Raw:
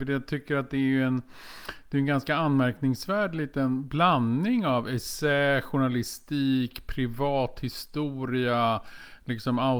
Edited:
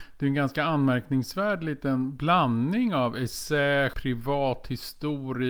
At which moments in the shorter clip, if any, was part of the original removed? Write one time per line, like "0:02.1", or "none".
0:03.9